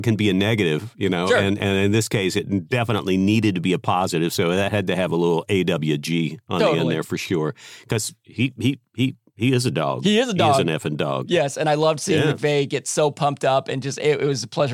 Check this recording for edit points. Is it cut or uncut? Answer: uncut